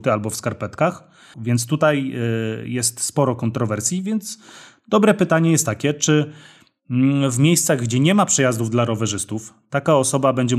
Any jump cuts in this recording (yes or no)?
yes